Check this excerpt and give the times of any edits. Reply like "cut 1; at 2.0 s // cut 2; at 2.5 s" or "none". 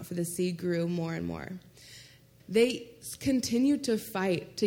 cut 1; at 2.4 s

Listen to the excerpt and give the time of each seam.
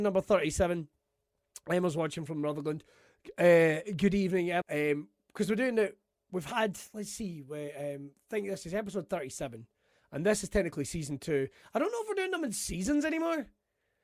cut 1; at 4.6 s

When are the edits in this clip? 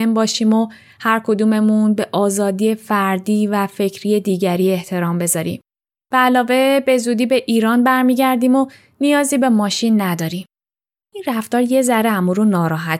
cut 1; at 6.0 s

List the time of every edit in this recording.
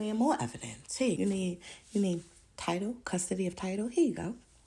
cut 1; at 1.2 s

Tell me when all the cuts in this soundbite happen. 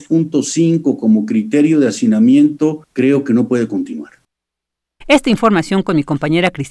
cut 1; at 5.0 s

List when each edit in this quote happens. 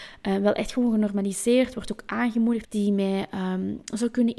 cut 1; at 2.6 s

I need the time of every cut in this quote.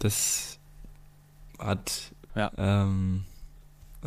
cut 1; at 2.3 s

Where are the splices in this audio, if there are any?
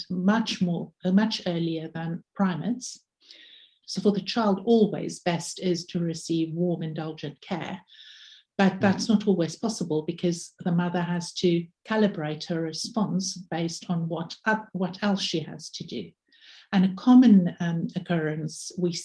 cut 1; at 3.8 s // cut 2; at 6.8 s

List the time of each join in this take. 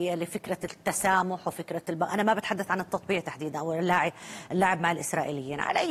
none

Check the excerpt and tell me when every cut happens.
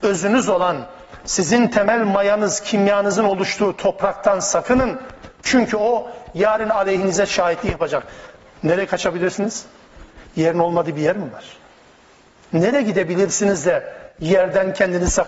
cut 1; at 10.2 s

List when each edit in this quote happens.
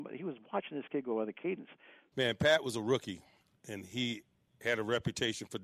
cut 1; at 2.1 s

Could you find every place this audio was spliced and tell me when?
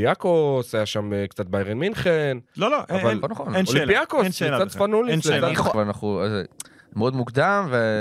cut 1; at 5.7 s

